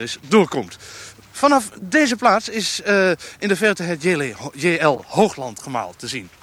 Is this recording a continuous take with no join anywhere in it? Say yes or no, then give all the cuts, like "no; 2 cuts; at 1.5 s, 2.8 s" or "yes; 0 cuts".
yes; 0 cuts